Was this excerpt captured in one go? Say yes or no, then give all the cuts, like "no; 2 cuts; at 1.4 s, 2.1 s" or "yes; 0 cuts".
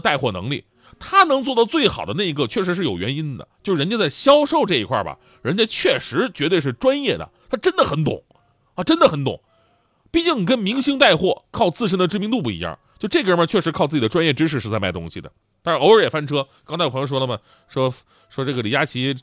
yes; 0 cuts